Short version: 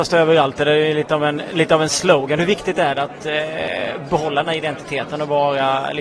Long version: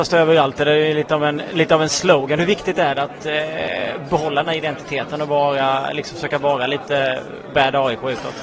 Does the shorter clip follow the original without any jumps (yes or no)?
yes